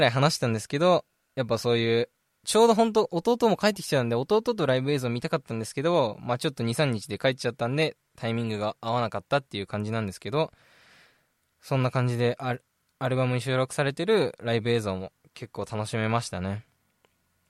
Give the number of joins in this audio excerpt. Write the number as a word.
zero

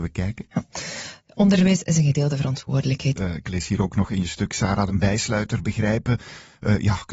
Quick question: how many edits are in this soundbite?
two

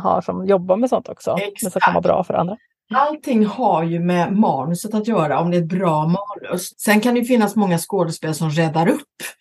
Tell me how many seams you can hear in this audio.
one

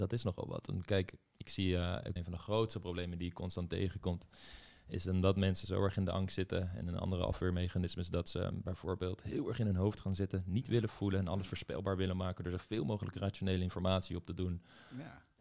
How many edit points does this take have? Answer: one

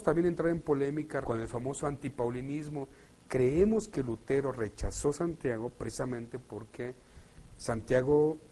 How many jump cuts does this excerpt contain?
one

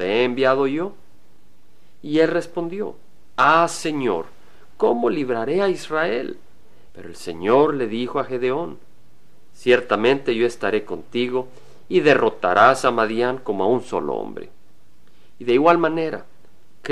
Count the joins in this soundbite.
one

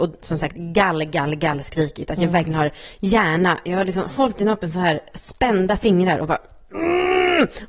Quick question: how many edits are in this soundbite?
zero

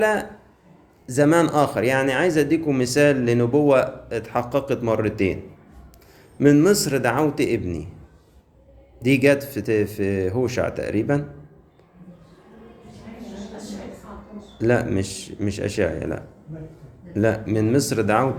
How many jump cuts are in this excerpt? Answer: one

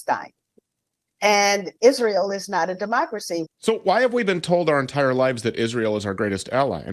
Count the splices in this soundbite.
two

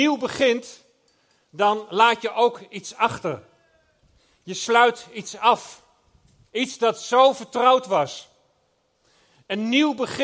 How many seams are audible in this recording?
one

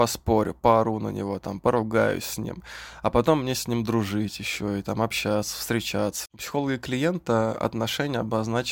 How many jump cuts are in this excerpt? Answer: one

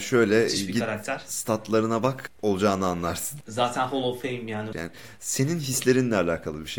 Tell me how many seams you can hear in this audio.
one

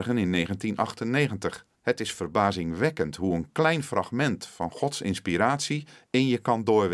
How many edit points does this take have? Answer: one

